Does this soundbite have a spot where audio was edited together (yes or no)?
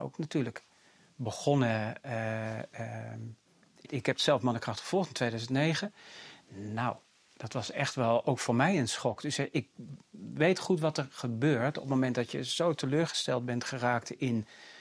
yes